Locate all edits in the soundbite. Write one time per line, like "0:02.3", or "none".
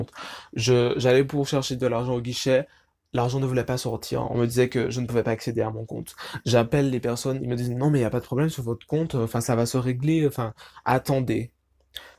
none